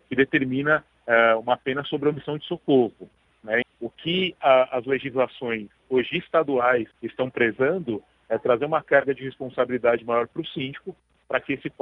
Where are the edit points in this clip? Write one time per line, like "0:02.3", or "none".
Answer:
0:03.6
0:06.9